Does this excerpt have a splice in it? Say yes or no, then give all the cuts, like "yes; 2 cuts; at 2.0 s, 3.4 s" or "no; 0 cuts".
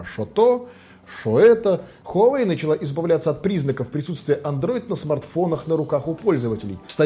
yes; 1 cut; at 2.0 s